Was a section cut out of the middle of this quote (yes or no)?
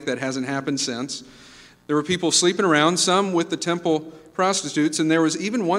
yes